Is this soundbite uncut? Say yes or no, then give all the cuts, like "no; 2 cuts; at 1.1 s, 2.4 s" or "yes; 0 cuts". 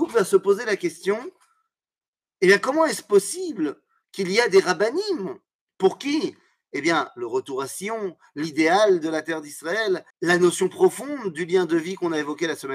no; 1 cut; at 10.1 s